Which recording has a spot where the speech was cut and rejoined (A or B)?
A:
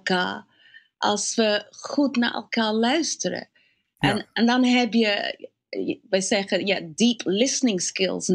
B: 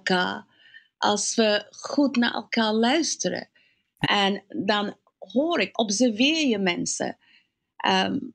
B